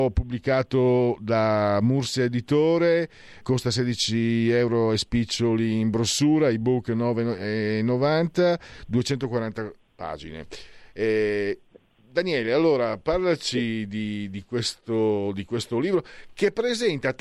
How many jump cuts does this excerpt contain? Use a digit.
1